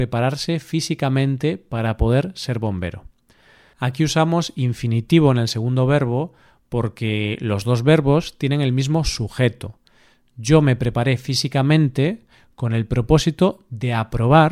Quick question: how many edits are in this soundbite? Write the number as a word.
zero